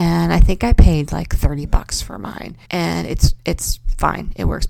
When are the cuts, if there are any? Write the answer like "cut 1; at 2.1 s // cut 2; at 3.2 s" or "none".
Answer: cut 1; at 2.6 s